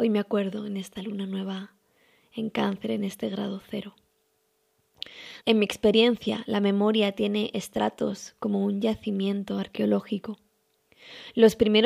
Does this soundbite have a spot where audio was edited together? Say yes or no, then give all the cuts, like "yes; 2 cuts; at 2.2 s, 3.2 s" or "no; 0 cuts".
yes; 1 cut; at 5.4 s